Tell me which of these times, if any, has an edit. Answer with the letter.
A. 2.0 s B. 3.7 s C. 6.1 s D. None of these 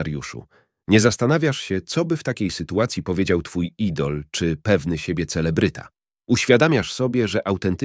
C